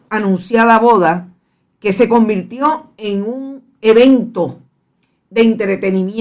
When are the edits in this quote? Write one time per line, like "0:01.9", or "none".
0:03.8